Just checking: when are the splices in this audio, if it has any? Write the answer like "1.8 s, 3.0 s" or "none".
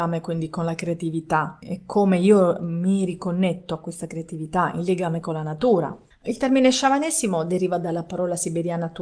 1.6 s, 6.1 s